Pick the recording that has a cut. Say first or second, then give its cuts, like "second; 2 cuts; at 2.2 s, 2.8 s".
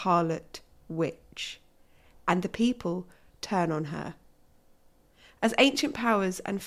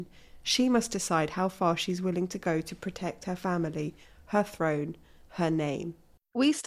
first; 1 cut; at 3.3 s